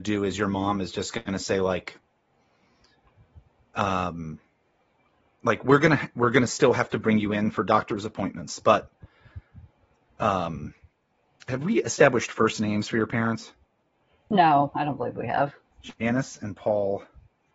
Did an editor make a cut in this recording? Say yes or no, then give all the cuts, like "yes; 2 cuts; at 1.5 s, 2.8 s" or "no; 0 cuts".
no; 0 cuts